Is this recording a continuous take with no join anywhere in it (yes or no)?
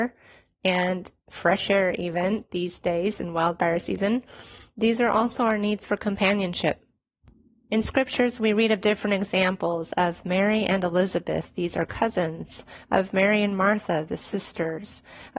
yes